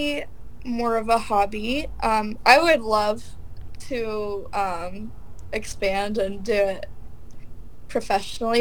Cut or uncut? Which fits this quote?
uncut